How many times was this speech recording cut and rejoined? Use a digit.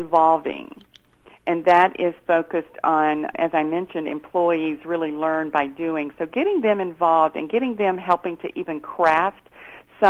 1